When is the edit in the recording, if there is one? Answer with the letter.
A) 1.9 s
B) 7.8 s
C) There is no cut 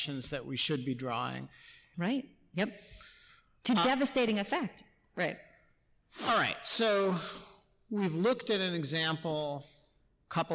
A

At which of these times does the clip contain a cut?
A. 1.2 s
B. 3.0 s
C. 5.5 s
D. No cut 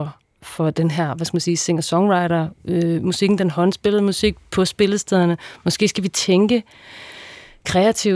D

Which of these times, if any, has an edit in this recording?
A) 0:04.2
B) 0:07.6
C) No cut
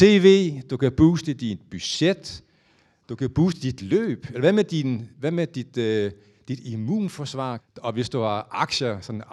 B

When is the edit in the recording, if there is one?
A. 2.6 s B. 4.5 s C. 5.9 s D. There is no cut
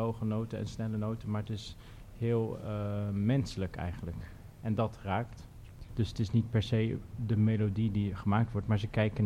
C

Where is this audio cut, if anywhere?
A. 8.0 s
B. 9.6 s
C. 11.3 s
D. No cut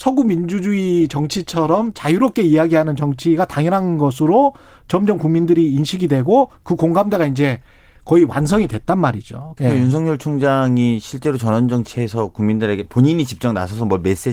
B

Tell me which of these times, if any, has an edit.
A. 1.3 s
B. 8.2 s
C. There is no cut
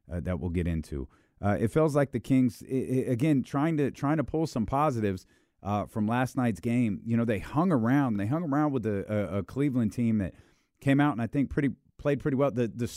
C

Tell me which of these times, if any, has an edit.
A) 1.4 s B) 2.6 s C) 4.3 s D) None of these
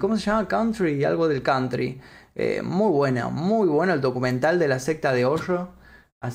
D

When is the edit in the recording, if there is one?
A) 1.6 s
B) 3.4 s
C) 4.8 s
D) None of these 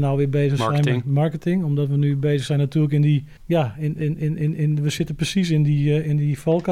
B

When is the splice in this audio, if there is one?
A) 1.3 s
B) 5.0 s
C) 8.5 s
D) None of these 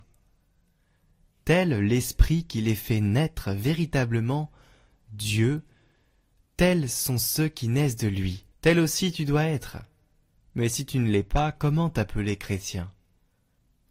C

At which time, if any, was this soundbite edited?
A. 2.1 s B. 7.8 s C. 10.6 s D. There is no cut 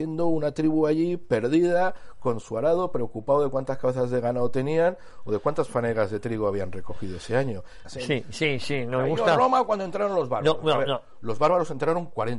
B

